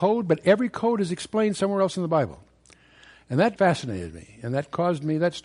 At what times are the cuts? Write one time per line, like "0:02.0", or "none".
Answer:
0:03.6